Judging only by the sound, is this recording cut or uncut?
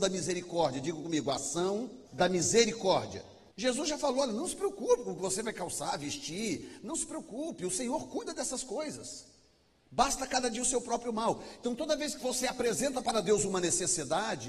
cut